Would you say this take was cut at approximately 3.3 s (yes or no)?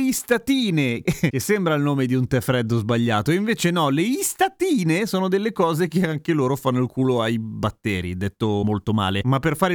no